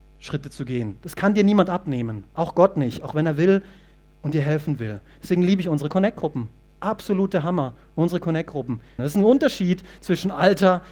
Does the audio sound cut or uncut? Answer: cut